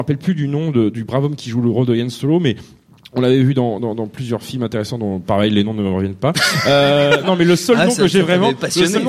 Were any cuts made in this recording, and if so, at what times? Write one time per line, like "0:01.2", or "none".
0:03.8
0:07.2